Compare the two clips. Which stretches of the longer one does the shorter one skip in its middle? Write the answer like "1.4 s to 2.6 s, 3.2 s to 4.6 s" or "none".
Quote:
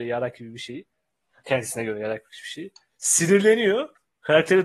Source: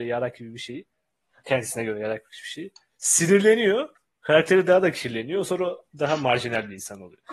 none